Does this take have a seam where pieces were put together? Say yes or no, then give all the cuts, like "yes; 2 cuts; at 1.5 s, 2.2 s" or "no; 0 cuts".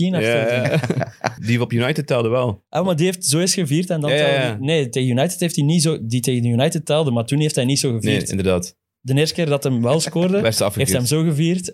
yes; 1 cut; at 1.4 s